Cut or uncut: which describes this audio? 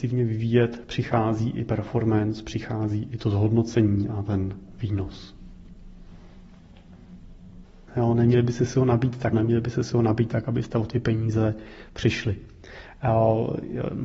cut